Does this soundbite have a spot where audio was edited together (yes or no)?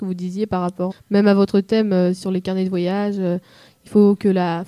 yes